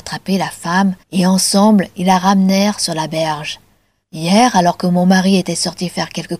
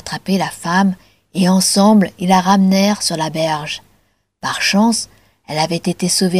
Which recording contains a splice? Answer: first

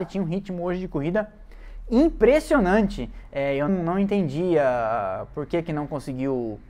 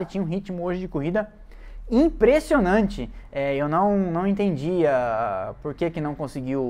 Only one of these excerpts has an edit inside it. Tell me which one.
first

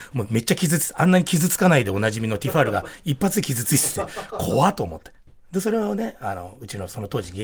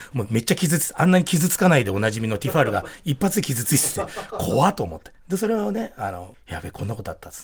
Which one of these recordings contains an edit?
second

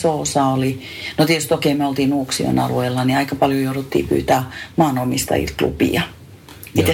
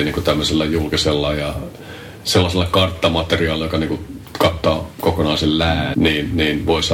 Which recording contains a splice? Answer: second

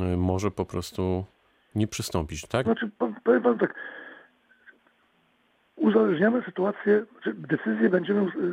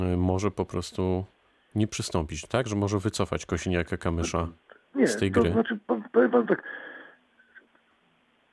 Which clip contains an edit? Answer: first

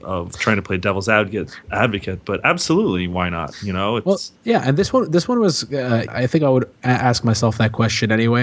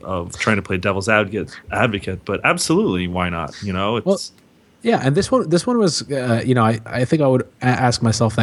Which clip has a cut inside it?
first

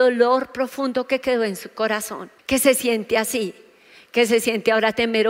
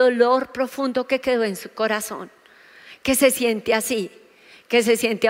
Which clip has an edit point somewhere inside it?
first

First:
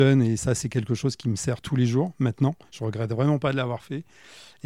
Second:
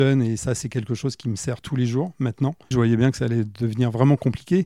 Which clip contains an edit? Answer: second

